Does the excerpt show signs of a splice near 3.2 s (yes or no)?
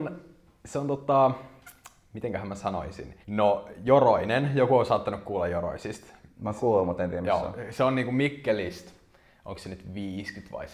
yes